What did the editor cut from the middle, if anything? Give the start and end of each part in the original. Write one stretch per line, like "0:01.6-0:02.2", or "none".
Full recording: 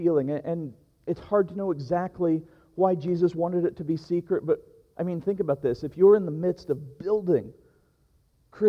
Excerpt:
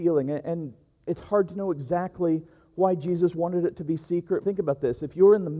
0:04.4-0:05.2